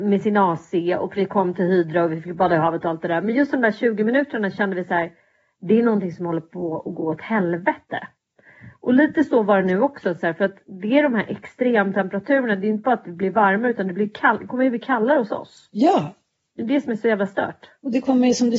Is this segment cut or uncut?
uncut